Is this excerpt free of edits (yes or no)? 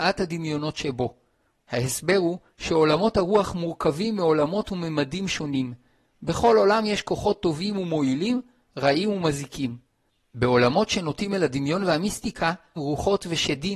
no